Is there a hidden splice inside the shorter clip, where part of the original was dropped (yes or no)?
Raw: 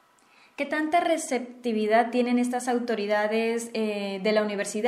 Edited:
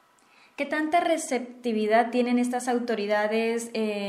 no